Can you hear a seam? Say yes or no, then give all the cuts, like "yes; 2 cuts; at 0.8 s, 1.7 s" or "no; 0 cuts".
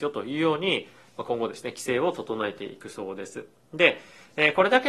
no; 0 cuts